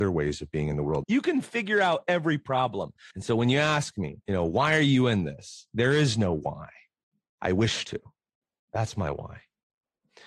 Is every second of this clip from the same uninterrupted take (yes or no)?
no